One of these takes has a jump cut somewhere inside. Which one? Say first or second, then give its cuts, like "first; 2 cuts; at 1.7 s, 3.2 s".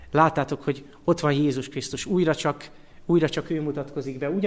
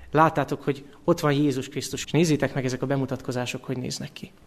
second; 1 cut; at 2.0 s